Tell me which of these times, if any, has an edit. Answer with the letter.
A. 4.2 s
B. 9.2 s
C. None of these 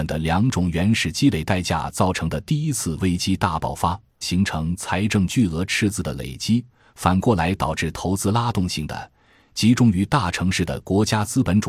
A